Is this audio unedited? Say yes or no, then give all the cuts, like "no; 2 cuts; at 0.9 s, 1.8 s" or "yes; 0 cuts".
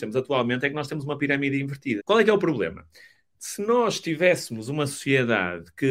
no; 1 cut; at 2.0 s